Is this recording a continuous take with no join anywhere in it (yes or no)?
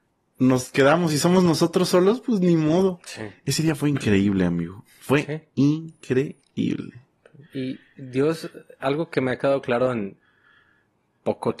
yes